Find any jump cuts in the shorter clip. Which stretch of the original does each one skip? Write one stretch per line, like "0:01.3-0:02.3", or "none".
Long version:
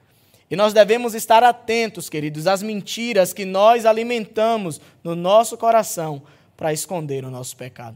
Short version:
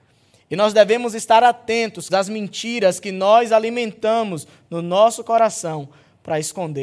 0:02.1-0:02.4